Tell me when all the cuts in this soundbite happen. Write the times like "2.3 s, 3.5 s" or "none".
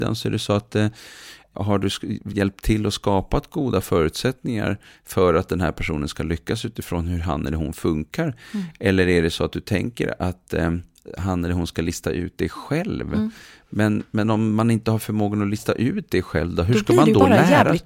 none